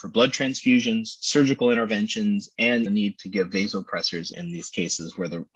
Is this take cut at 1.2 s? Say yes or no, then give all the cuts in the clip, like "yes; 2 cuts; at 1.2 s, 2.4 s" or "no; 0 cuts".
no; 2 cuts; at 2.9 s, 4.3 s